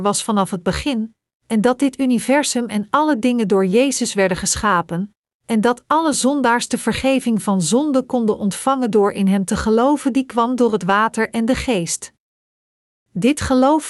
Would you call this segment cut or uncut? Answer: uncut